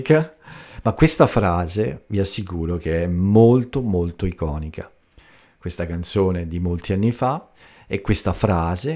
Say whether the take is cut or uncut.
uncut